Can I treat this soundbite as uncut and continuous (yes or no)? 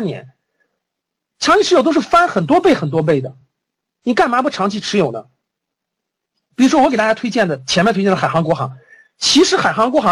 yes